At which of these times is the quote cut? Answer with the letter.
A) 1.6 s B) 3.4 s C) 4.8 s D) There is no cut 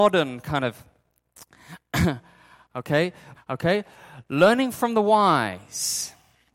B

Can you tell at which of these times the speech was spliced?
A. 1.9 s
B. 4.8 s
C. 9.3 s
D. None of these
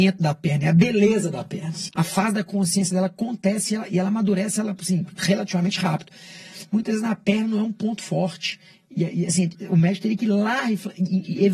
A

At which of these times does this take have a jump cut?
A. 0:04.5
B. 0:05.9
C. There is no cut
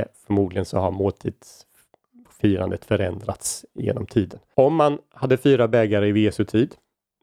A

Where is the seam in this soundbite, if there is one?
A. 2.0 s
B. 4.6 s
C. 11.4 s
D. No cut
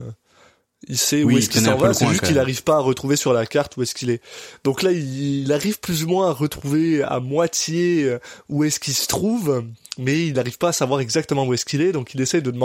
D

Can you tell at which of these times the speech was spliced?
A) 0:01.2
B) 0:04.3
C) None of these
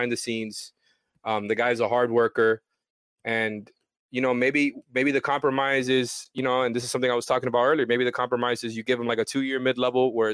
C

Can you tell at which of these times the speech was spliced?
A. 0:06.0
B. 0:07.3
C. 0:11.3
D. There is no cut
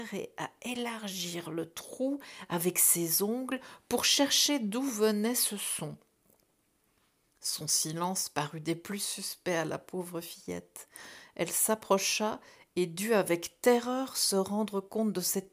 D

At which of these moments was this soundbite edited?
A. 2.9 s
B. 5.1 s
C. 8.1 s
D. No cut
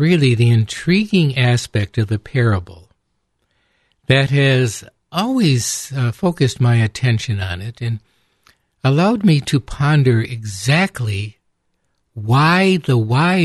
D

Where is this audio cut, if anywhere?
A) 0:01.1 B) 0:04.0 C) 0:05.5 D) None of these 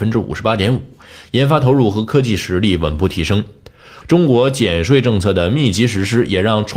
B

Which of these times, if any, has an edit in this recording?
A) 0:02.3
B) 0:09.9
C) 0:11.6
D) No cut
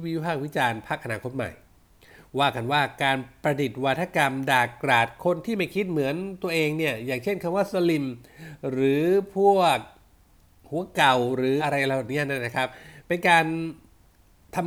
C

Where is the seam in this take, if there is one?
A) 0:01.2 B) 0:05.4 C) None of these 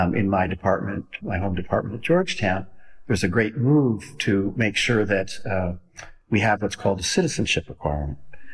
A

